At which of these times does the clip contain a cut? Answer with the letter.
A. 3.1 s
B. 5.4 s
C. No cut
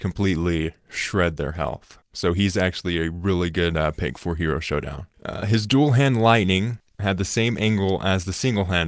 C